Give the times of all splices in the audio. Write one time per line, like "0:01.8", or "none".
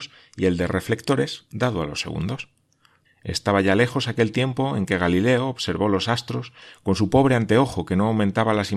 0:03.0